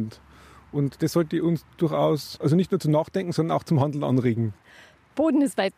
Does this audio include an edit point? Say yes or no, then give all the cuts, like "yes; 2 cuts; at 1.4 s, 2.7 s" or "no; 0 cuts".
no; 0 cuts